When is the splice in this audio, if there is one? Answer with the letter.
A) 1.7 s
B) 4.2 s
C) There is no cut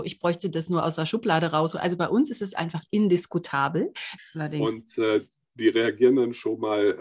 B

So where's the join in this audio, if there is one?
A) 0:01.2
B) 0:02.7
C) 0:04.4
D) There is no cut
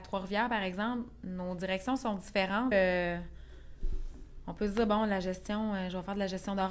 B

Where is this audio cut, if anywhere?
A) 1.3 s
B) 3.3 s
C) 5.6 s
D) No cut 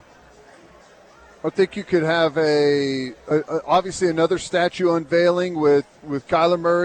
D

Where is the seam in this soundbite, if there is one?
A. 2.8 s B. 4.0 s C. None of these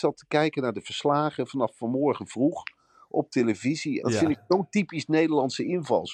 B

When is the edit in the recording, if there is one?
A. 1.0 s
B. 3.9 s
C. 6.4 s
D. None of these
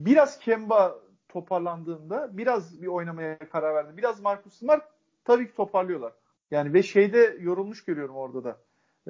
C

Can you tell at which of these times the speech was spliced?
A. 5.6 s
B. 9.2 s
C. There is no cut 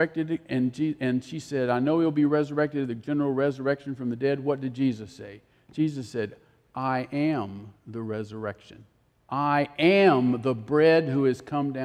B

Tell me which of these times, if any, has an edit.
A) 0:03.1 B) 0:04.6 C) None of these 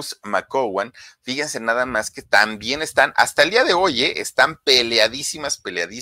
C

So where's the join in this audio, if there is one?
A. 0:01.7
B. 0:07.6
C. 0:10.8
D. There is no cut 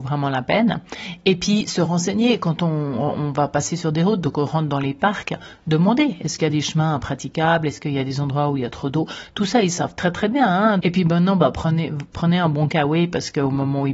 C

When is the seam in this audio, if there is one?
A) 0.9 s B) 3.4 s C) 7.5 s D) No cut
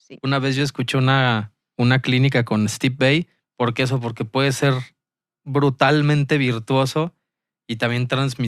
B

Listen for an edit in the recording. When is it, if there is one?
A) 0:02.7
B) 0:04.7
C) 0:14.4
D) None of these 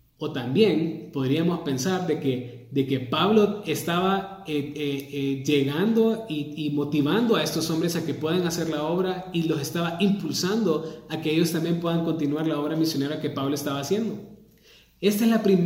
D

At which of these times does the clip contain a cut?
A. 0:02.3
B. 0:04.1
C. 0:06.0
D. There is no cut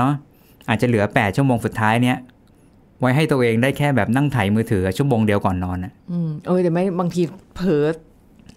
C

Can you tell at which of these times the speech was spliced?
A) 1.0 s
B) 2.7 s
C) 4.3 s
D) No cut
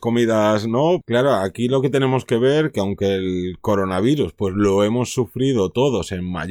A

